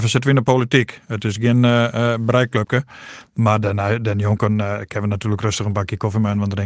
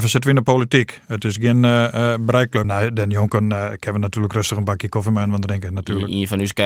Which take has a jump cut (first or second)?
second